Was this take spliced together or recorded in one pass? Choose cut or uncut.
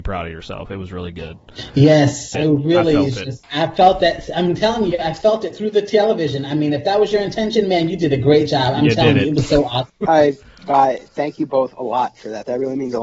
cut